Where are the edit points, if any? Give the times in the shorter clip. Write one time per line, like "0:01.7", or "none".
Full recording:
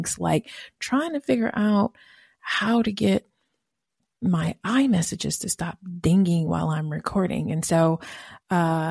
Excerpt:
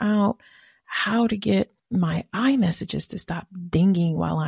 0:01.8